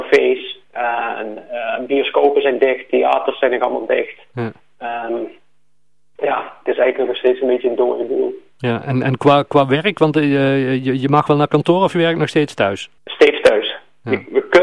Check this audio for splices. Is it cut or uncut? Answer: cut